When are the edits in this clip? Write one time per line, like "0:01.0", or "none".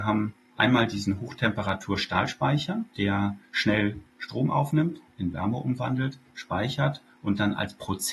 none